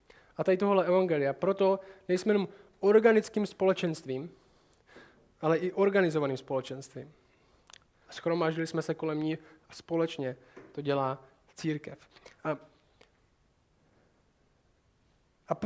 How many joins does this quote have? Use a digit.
1